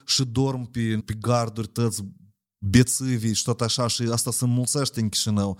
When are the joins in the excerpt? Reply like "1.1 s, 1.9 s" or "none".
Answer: 1.0 s